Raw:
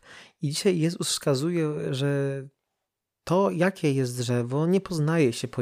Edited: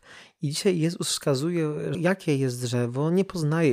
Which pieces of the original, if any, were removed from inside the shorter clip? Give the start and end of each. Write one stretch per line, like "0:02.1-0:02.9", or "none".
0:01.9-0:03.5

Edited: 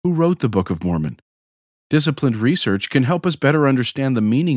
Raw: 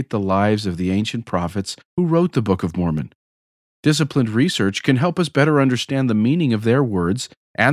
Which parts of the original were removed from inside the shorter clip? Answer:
none

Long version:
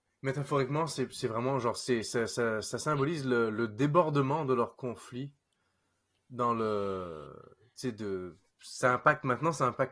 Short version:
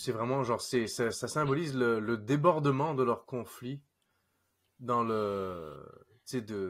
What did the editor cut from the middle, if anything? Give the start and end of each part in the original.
0:02.3-0:02.6

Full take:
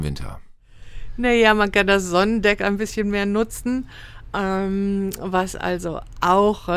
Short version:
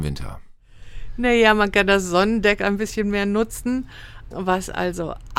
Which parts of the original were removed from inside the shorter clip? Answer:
0:04.3-0:05.2

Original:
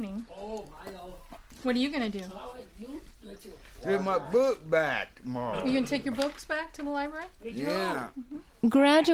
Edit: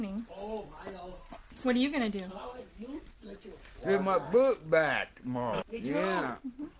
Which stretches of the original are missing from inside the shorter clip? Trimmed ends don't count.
0:05.6-0:07.3

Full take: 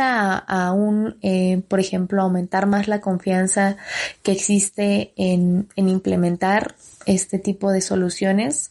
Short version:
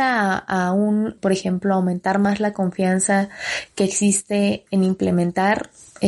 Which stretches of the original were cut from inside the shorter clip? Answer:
0:01.2-0:01.7
0:05.1-0:05.7

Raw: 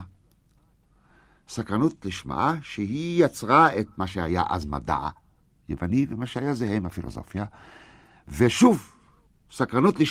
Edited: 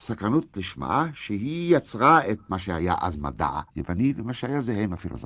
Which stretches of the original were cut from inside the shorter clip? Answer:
0:05.2-0:05.6

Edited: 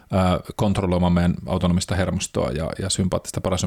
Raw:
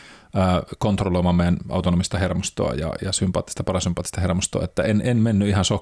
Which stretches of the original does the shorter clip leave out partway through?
none

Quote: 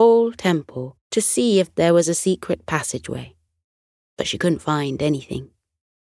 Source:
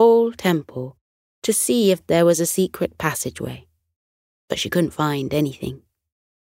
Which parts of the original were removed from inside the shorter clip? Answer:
0:01.0-0:01.3

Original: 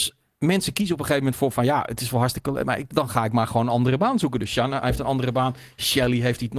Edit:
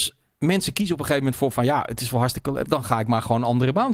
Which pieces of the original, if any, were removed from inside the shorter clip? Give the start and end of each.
0:02.6-0:02.9

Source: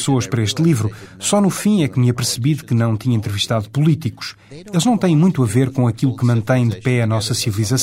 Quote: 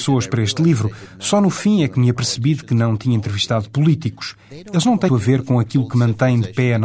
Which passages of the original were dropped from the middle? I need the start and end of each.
0:05.1-0:05.4

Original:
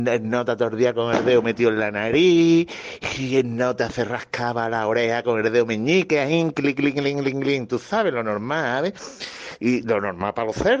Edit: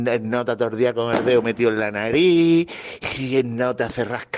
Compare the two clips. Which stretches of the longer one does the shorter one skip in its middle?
none

